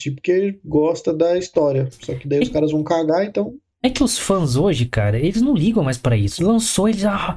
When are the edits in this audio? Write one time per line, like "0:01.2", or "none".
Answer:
0:06.4